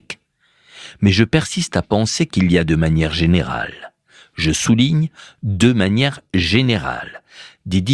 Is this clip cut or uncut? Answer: uncut